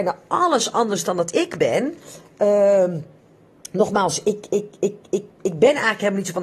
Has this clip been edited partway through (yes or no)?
no